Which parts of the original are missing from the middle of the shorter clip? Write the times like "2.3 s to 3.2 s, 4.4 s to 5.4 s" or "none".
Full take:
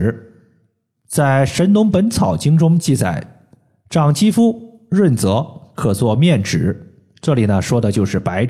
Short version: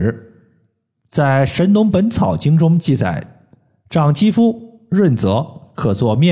none

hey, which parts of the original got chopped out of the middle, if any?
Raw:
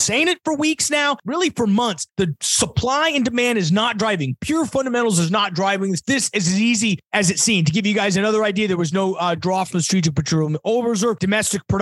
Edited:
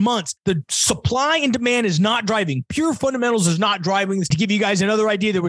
6.0 s to 7.7 s

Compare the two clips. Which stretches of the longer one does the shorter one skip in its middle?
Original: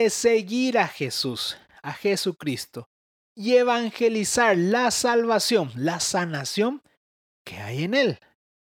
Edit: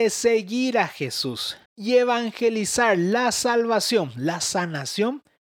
1.7 s to 3.2 s

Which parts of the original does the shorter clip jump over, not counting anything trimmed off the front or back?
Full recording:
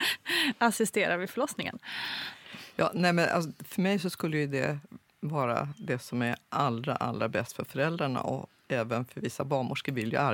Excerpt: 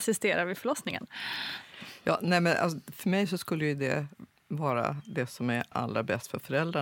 6.4 s to 7.0 s

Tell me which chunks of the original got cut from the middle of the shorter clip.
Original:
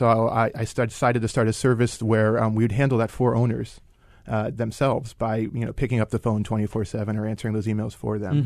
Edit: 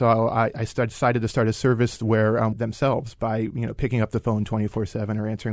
2.5 s to 4.5 s

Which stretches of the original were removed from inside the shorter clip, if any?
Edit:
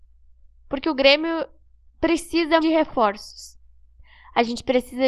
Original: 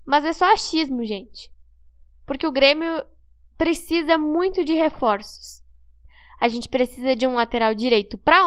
4.2 s to 4.7 s

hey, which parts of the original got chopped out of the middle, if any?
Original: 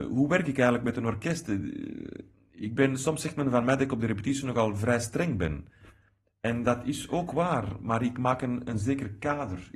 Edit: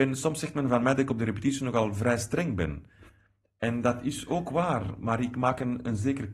none

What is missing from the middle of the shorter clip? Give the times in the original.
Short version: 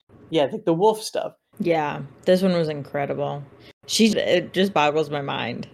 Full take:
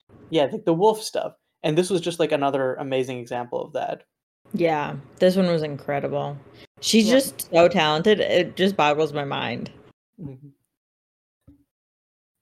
1.5 s to 4.5 s, 7.1 s to 8.2 s

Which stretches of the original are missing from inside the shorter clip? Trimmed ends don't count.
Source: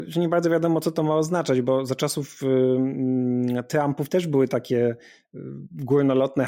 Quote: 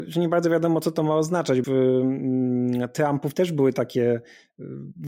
1.6 s to 2.4 s

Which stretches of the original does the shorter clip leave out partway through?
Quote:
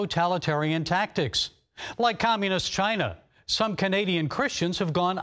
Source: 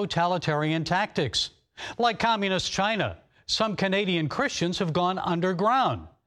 none

